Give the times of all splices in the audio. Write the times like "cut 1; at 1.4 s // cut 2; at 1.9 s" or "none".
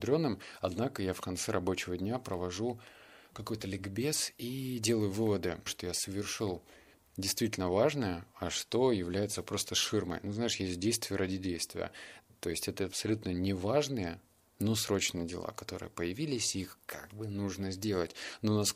cut 1; at 5.7 s